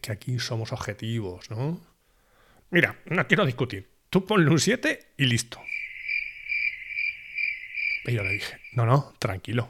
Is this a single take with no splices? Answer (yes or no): yes